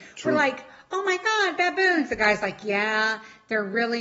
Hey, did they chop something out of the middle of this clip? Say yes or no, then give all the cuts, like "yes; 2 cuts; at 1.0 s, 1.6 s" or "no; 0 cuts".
no; 0 cuts